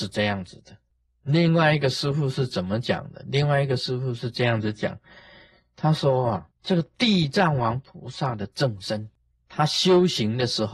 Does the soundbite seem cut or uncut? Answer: uncut